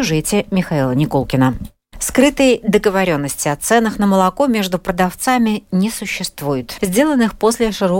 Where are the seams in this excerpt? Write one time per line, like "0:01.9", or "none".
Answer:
0:01.9
0:06.8

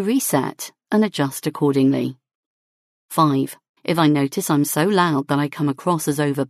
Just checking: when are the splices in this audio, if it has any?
0:03.8

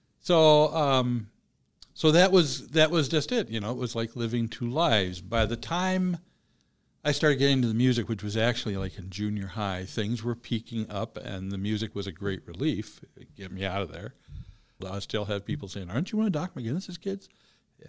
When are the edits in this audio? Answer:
0:14.8

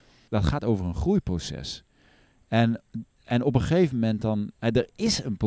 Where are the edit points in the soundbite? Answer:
none

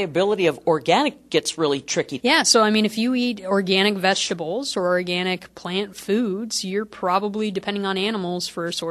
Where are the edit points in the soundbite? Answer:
0:02.2

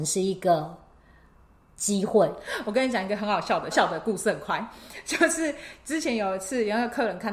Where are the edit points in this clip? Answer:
0:03.7

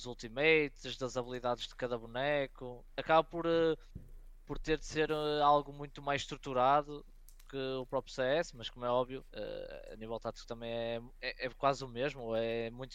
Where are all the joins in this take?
0:02.9
0:09.3

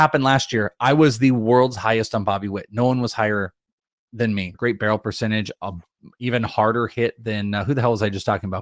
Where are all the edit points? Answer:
0:04.5

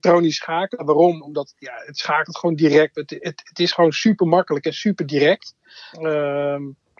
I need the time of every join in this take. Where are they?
0:02.9
0:05.9

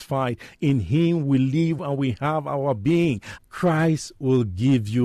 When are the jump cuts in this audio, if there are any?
0:01.8
0:03.4

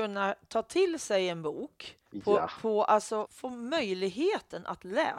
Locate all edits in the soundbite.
0:02.0
0:03.3

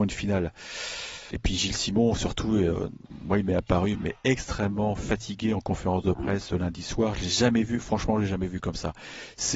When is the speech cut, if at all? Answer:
0:01.3

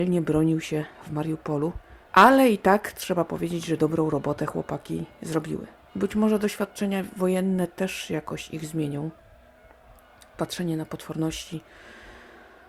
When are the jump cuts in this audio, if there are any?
0:02.1

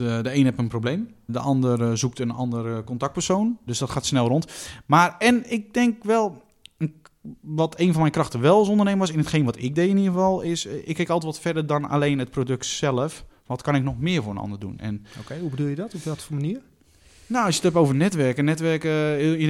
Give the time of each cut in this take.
0:01.3
0:03.7

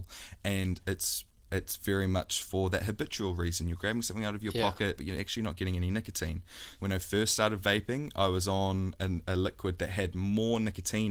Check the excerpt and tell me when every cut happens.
0:05.0
0:06.7
0:09.0

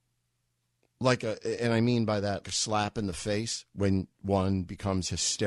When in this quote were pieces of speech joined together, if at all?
0:02.4

